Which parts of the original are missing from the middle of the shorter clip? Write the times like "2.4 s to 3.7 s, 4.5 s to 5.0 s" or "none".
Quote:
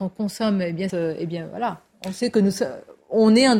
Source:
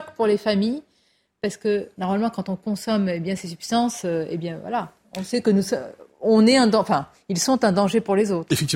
3.4 s to 4.0 s